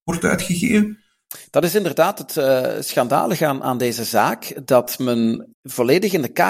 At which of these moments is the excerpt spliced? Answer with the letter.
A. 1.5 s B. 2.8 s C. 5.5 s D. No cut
C